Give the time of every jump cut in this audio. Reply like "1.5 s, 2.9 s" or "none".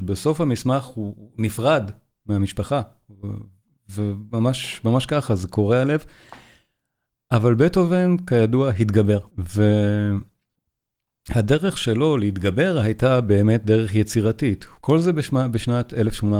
9.3 s, 14.8 s